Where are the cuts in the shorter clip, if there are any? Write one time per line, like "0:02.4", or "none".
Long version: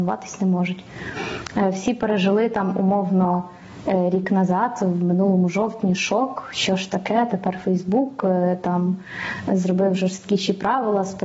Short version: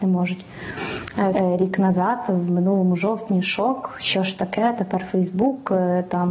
0:01.3